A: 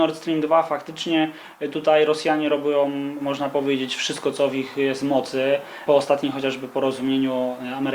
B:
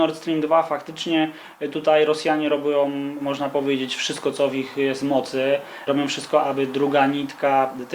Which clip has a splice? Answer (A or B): B